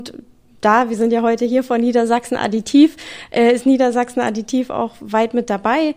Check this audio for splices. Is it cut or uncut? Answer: uncut